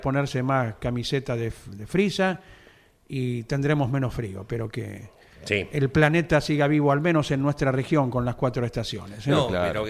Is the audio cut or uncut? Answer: uncut